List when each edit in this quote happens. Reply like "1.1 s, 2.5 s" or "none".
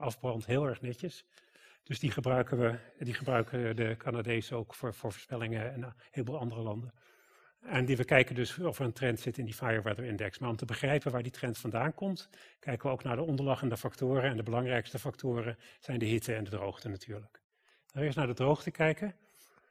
none

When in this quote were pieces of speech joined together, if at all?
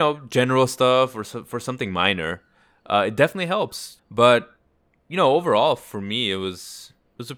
4.0 s

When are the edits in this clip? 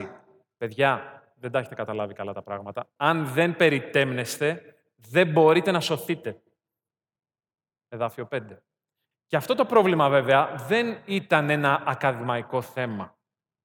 9.1 s

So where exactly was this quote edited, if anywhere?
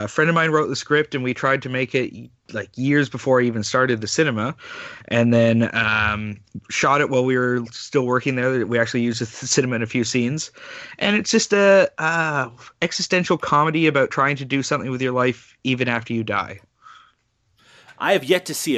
2.4 s

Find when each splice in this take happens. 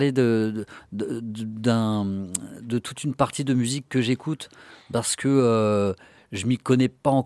none

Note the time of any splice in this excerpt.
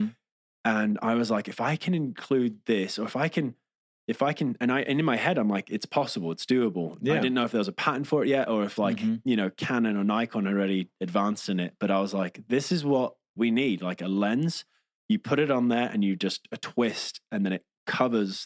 none

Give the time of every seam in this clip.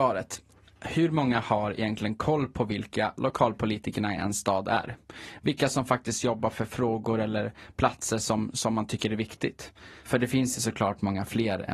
none

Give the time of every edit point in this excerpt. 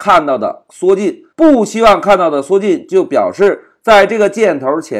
1.3 s

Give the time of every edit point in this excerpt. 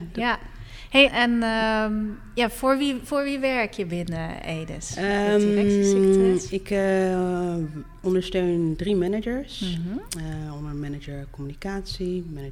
1.1 s

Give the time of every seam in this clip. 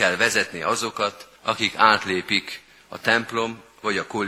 1.4 s

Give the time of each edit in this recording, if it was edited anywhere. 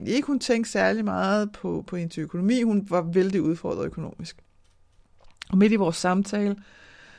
none

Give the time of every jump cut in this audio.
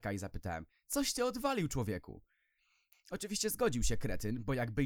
2.9 s

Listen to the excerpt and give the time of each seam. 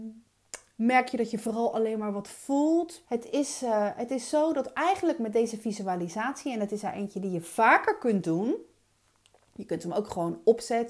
3.0 s

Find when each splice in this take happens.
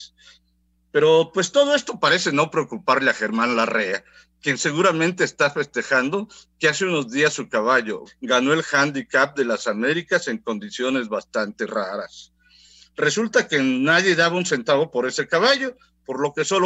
8.1 s

